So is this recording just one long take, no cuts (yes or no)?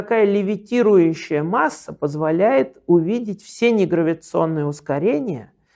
yes